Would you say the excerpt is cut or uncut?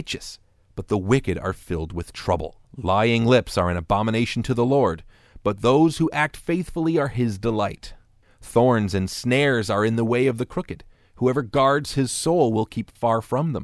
cut